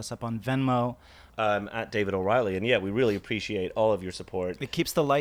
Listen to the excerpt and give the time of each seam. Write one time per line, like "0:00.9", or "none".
0:01.3